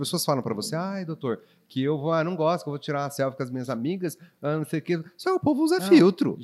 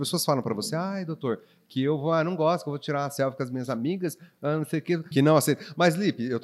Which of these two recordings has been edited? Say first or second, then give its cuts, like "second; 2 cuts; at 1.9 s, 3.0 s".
second; 1 cut; at 5.1 s